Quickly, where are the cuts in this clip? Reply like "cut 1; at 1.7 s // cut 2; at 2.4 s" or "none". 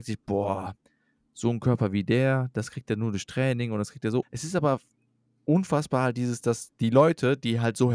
cut 1; at 4.2 s